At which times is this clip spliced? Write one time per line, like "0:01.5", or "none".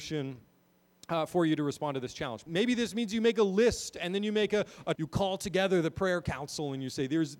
0:02.5
0:04.9